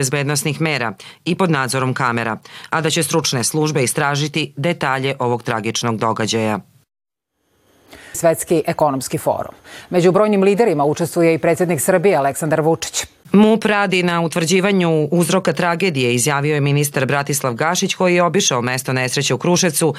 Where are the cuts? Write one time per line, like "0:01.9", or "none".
0:08.1
0:13.2